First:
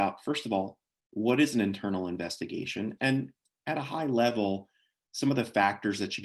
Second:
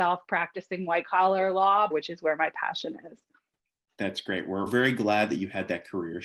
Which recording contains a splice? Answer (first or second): second